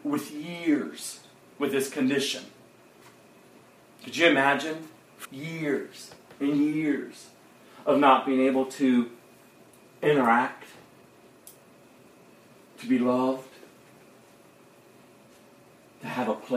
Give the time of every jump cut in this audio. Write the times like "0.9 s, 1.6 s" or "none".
5.2 s